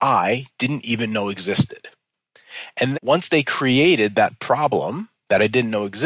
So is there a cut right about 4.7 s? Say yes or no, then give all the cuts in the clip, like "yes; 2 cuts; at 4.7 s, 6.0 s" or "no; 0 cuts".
no; 1 cut; at 2.9 s